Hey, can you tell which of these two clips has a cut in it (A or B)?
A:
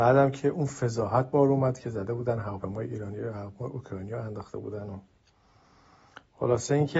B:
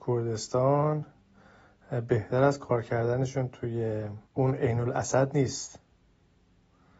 B